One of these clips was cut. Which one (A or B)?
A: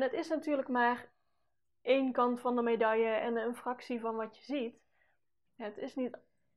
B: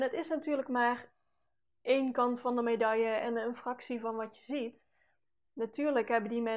A